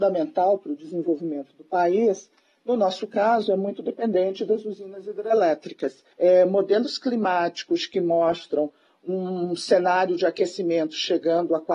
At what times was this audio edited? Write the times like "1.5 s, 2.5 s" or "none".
6.1 s